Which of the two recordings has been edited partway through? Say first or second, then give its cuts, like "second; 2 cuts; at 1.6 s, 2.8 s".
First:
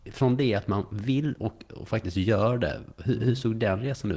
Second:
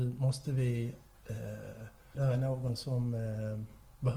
second; 1 cut; at 2.1 s